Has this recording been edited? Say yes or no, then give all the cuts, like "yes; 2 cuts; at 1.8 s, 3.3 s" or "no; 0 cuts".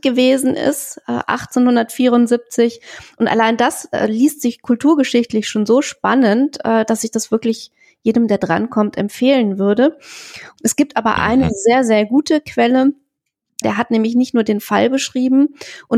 yes; 2 cuts; at 10.6 s, 13.6 s